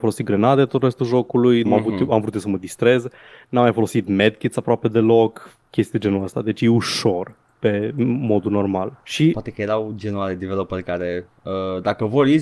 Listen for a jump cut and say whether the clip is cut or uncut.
cut